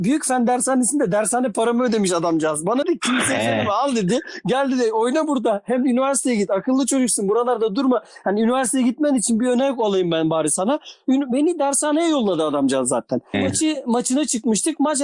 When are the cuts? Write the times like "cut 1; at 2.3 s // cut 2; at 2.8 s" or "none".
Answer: cut 1; at 2.8 s // cut 2; at 13.3 s